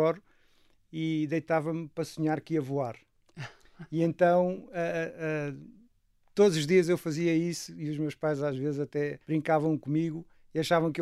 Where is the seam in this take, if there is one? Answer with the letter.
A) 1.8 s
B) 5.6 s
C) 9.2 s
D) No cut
C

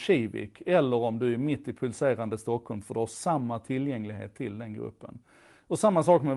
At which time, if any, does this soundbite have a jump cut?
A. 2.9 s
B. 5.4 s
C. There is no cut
C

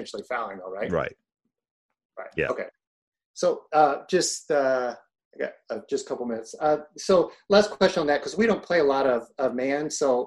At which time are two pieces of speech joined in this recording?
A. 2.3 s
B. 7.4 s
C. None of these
C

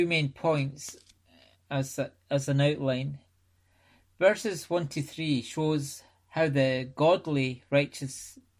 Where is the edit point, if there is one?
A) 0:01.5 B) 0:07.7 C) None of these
A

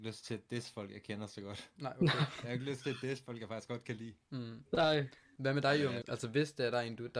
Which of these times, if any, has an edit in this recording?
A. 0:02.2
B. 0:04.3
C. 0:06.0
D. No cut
C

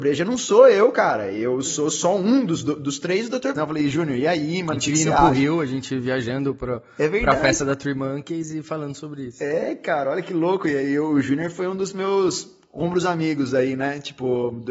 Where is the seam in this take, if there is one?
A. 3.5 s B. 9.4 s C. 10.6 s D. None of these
A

